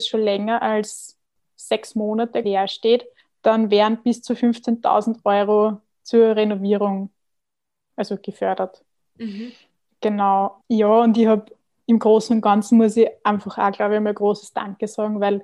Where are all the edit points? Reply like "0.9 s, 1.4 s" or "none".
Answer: 2.4 s, 10.6 s

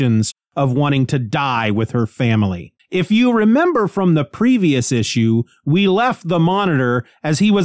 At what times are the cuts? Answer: 2.8 s

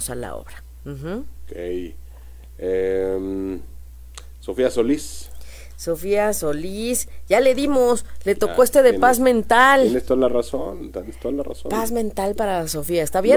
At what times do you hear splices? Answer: none

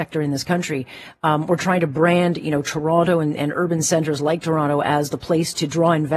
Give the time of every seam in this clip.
none

